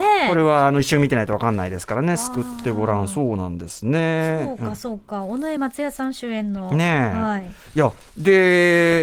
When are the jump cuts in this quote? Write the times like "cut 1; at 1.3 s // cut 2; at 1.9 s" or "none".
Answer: none